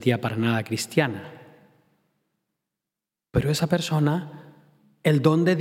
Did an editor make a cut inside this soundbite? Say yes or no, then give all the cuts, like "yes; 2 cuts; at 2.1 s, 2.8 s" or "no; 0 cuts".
no; 0 cuts